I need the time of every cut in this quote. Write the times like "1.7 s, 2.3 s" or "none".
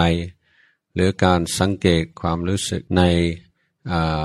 2.9 s